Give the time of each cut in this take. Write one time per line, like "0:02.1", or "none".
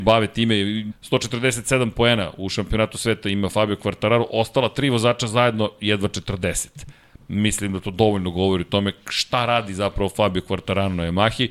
0:00.9